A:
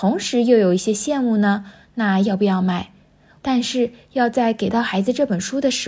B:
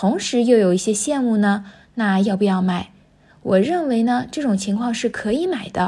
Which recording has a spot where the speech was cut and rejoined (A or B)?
A